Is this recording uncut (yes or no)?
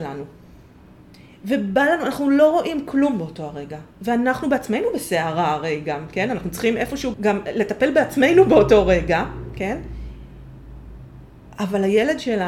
no